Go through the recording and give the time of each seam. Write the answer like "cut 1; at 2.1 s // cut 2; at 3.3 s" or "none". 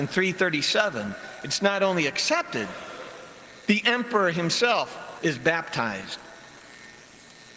cut 1; at 5.2 s